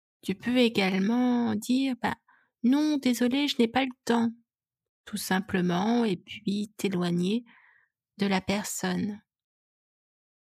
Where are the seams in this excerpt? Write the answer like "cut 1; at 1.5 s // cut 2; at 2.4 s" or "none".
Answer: none

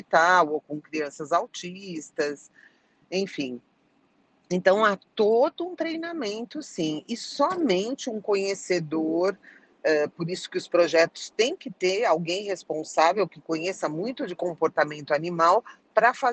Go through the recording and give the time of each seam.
none

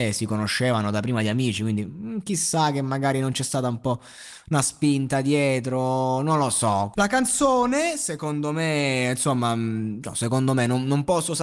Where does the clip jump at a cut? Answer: cut 1; at 6.9 s

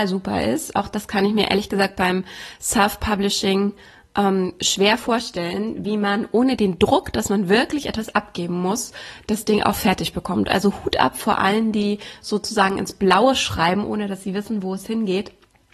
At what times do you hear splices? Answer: none

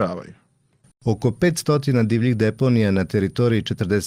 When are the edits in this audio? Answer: cut 1; at 0.9 s

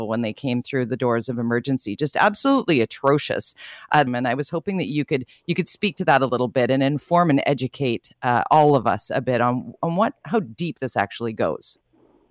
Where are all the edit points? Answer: cut 1; at 4.1 s

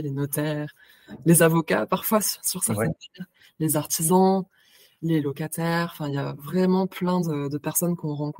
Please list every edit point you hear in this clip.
none

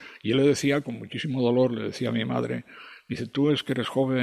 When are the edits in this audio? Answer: none

